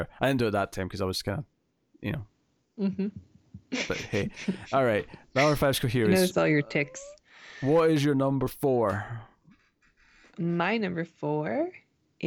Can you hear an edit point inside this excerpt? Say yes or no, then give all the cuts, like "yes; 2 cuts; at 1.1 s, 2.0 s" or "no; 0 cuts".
no; 0 cuts